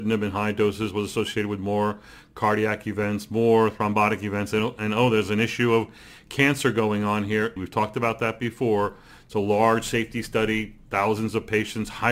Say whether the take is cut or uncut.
cut